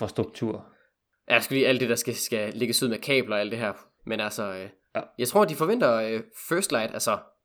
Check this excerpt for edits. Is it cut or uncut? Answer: cut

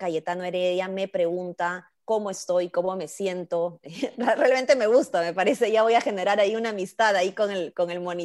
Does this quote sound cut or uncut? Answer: uncut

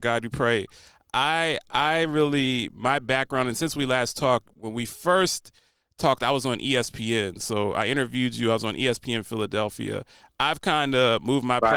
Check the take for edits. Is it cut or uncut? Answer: uncut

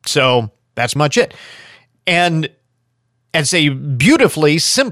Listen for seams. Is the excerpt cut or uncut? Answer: cut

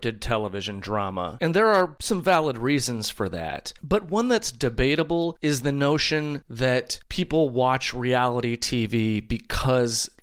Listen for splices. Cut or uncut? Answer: uncut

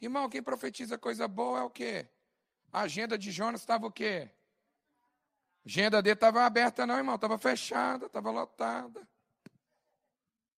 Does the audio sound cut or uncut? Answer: uncut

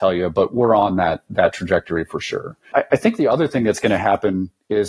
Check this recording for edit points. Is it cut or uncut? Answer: cut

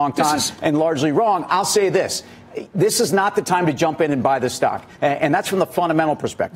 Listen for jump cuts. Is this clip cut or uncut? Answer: uncut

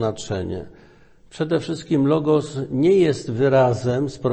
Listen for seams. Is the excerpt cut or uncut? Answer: uncut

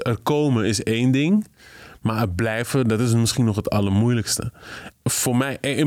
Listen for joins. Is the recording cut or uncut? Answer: cut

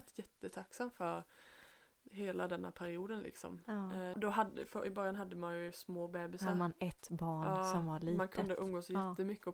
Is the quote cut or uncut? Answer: cut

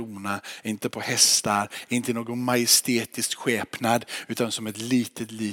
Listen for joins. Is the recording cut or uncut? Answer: cut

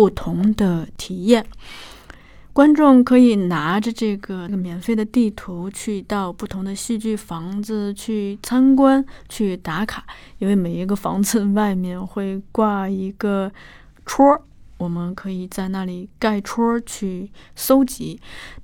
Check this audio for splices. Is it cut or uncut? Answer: uncut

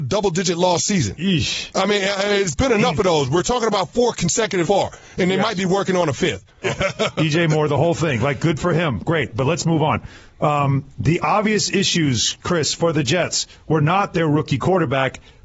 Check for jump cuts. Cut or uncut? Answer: cut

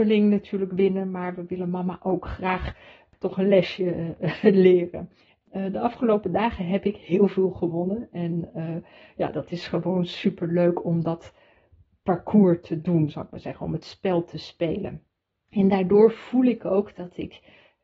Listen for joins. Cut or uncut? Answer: uncut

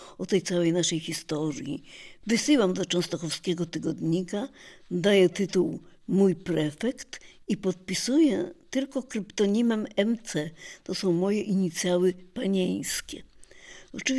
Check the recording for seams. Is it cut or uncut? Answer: uncut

